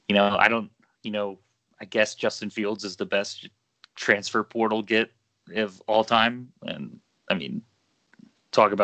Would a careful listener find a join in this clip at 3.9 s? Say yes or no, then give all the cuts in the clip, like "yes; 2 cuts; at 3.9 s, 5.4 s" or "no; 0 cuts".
no; 1 cut; at 6.6 s